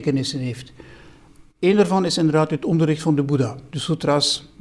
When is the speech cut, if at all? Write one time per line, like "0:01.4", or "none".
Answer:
0:03.7